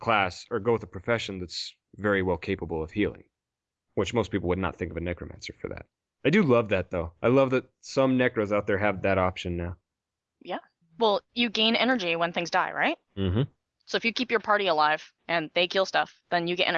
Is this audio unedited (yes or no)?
yes